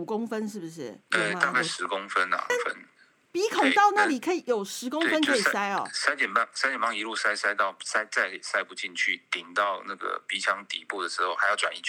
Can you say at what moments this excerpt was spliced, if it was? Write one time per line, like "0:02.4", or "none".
0:02.5